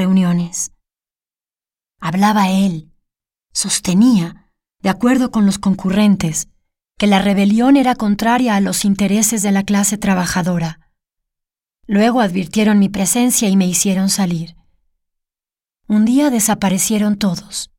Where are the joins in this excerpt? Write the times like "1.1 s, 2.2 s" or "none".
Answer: none